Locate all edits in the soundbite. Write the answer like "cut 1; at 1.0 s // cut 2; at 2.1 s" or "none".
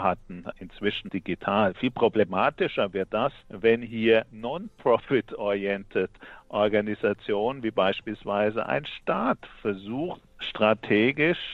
cut 1; at 1.1 s